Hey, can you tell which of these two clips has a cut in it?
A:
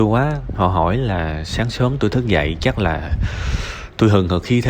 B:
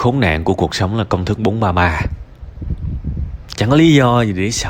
B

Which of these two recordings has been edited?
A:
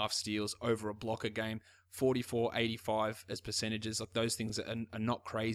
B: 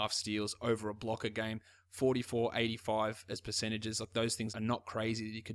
B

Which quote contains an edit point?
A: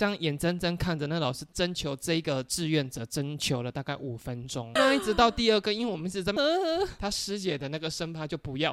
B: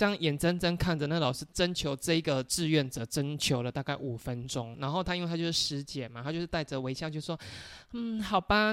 A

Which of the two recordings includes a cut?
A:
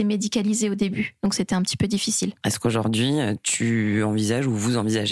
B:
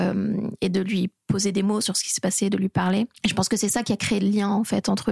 B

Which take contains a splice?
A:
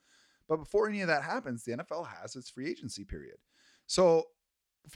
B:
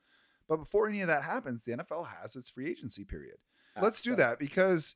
B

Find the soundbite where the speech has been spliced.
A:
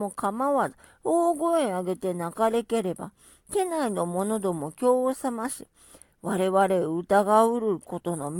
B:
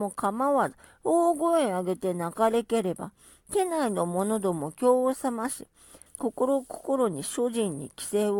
B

